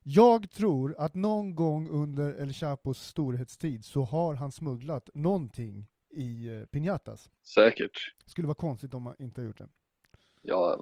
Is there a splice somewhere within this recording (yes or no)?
yes